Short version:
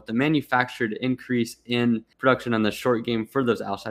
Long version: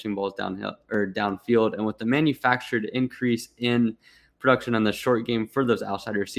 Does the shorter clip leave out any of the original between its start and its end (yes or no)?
yes